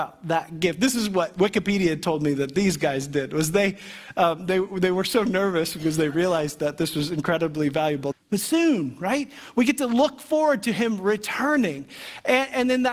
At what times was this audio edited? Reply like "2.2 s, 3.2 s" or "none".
8.1 s